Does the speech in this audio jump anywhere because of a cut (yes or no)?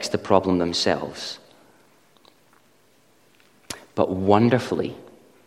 no